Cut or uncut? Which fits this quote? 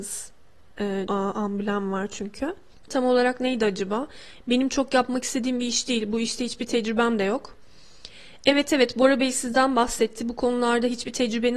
cut